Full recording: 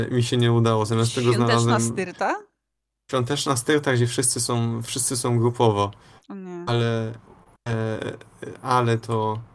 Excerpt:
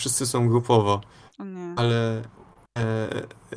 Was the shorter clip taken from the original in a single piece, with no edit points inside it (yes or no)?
yes